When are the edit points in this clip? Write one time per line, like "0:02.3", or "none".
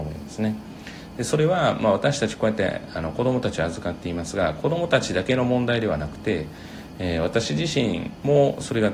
none